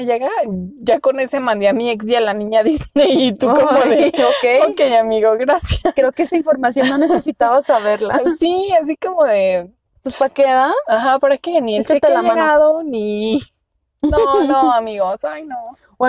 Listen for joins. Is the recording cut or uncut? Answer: uncut